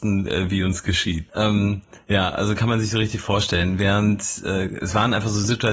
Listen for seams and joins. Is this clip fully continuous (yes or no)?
no